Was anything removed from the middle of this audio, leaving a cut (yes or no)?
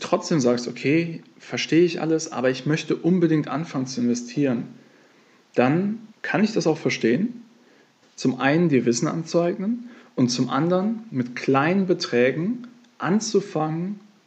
yes